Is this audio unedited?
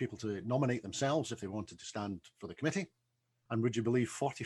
no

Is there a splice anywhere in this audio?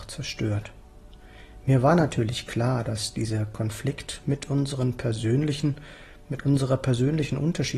no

